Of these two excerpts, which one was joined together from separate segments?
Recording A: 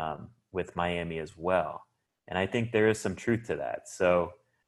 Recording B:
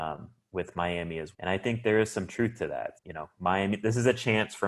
B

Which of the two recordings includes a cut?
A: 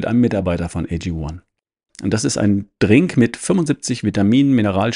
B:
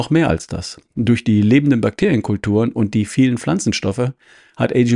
A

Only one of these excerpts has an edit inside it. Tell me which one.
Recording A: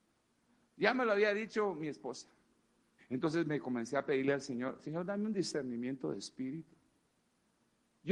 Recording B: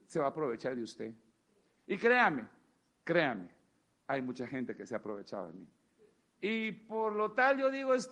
A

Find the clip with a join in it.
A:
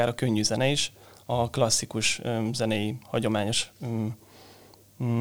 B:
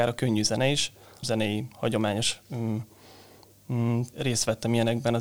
B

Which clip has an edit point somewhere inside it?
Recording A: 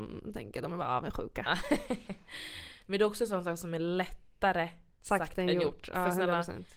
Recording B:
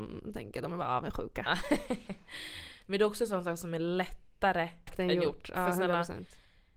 B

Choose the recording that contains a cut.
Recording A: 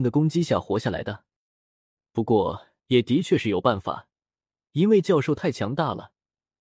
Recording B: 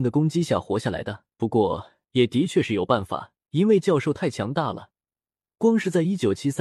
B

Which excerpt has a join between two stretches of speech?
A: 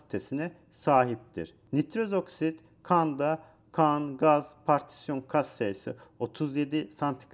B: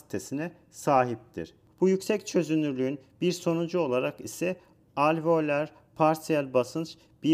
B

